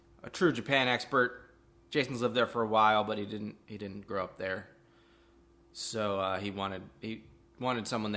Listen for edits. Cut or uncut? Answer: uncut